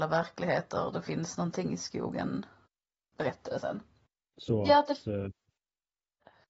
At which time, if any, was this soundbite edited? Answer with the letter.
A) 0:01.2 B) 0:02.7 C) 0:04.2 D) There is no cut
C